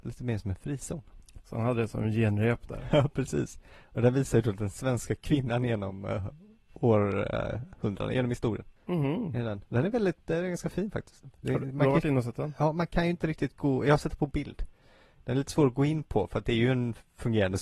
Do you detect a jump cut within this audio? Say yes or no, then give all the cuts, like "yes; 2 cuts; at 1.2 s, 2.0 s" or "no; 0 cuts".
yes; 1 cut; at 8.8 s